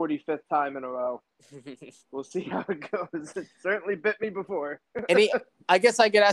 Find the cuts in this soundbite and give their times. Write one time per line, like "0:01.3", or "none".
none